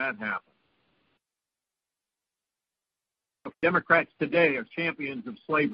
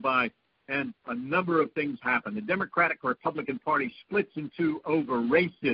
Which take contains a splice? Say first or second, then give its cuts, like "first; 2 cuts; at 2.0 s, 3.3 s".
first; 2 cuts; at 3.5 s, 4.7 s